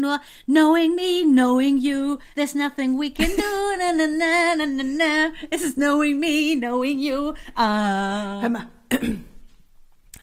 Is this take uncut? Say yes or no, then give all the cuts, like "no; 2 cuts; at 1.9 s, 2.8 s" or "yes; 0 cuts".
no; 1 cut; at 2.3 s